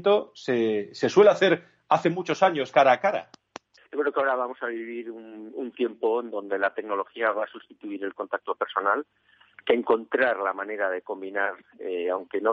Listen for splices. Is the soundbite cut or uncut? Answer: cut